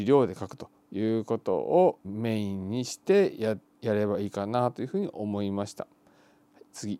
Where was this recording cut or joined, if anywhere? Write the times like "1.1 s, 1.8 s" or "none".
2.0 s